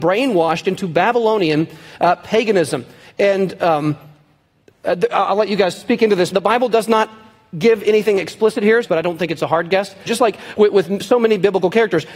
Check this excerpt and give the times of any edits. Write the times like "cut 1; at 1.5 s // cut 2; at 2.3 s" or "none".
cut 1; at 6.3 s // cut 2; at 8.8 s // cut 3; at 10.1 s